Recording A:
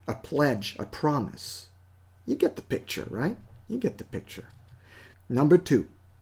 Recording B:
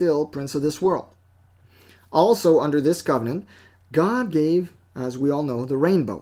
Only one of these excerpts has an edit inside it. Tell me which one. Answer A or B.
A